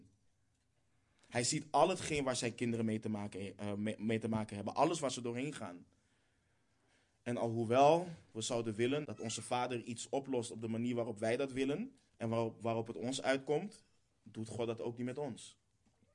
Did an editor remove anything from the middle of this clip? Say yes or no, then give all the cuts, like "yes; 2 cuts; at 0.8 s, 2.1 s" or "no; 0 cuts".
yes; 2 cuts; at 9.0 s, 12.1 s